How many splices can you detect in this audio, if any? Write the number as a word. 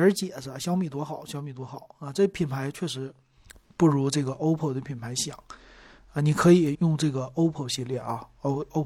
one